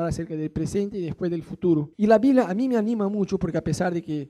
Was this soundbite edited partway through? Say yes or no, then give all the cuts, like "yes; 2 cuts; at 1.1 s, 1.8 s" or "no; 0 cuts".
yes; 1 cut; at 1.9 s